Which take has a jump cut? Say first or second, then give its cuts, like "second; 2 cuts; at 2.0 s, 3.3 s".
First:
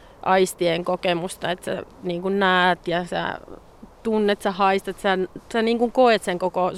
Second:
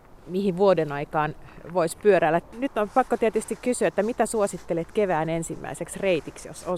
second; 1 cut; at 2.4 s